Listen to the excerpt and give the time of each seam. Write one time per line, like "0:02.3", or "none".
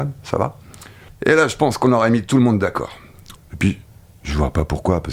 0:01.1
0:03.4